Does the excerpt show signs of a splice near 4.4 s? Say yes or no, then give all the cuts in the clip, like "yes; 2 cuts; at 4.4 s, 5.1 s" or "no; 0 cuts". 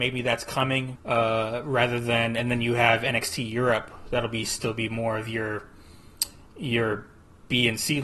no; 1 cut; at 0.9 s